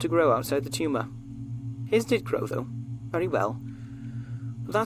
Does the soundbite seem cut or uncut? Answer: uncut